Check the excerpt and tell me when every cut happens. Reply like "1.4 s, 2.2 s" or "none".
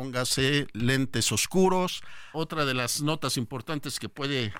2.3 s